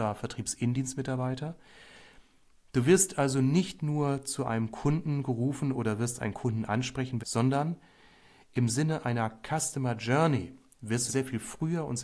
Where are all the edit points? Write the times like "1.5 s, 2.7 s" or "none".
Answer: 7.2 s, 11.1 s